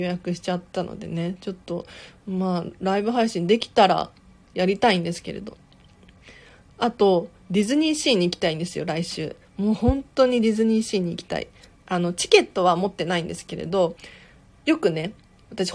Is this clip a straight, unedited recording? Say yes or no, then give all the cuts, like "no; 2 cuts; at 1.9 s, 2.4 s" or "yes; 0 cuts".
yes; 0 cuts